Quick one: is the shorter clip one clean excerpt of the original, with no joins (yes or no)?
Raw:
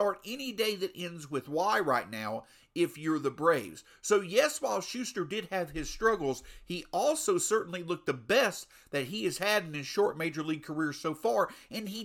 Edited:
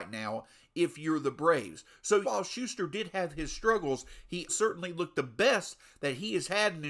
no